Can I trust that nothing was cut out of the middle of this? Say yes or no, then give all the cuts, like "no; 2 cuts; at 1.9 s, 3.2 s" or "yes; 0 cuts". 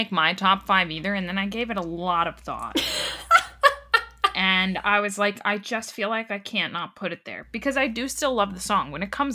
yes; 0 cuts